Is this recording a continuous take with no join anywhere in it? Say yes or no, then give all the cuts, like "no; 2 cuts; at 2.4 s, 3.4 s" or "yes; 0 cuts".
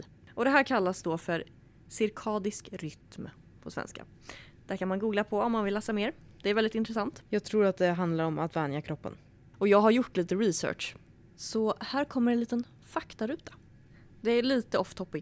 no; 2 cuts; at 7.2 s, 9.5 s